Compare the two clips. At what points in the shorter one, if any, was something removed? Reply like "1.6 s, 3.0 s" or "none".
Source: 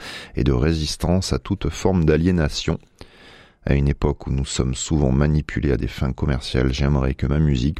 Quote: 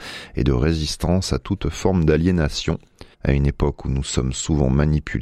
3.1 s